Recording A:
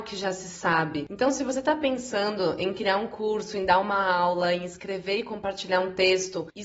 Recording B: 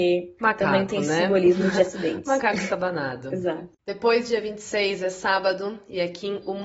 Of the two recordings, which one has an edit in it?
B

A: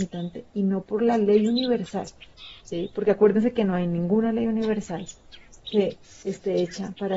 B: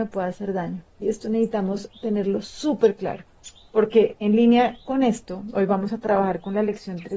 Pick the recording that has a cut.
B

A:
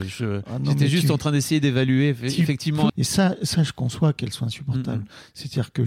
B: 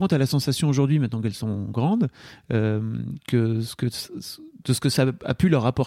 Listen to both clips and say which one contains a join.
A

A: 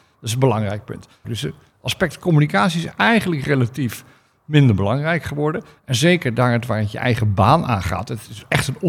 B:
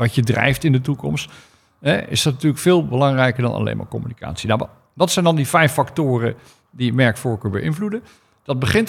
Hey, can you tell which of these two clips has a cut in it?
A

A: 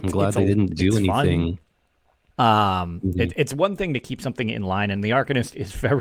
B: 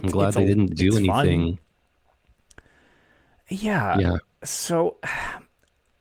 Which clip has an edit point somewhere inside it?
A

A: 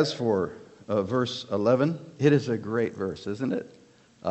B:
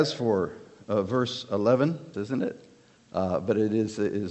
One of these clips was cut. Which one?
B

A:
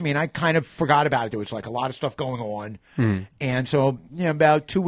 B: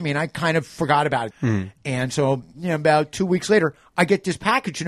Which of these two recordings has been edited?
B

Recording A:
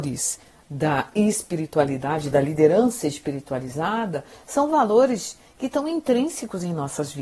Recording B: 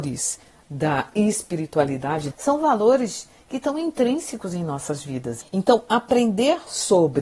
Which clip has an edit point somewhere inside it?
B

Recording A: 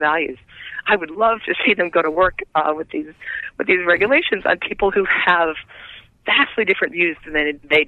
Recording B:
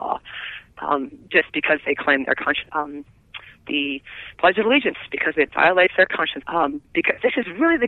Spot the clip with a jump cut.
B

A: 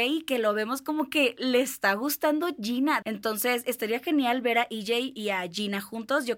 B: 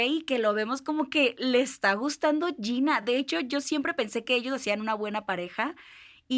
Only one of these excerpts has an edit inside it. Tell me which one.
A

